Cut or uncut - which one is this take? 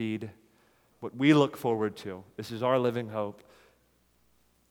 cut